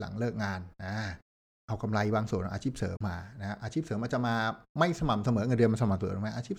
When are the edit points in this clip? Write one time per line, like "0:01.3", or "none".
0:03.0